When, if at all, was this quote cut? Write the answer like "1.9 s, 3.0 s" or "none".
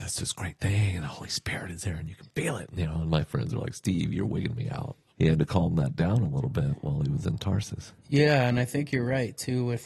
5.1 s